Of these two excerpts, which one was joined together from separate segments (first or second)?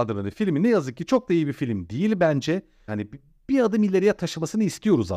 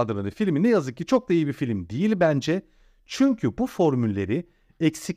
first